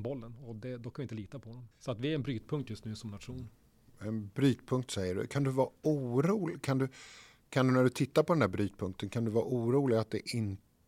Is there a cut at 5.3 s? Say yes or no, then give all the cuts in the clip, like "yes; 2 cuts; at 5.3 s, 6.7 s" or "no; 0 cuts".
no; 1 cut; at 1.7 s